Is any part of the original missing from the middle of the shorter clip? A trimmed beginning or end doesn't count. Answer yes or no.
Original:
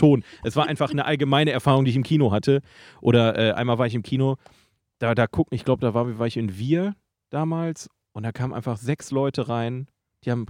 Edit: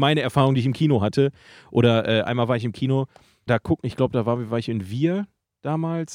yes